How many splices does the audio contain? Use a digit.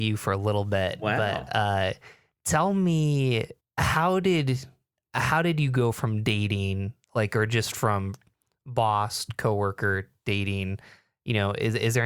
1